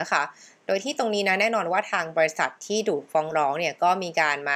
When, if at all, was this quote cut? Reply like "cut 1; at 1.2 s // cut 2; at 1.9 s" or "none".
none